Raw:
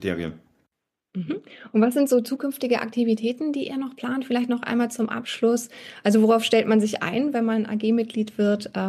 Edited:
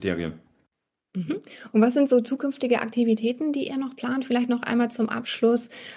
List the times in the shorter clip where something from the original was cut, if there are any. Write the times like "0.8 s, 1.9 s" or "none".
none